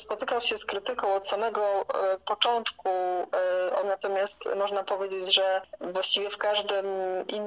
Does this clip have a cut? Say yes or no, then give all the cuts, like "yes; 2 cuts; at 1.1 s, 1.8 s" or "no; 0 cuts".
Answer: yes; 1 cut; at 3.8 s